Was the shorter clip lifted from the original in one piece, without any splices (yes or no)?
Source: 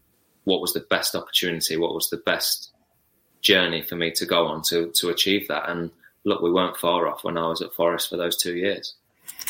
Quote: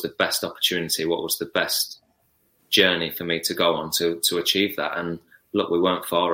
yes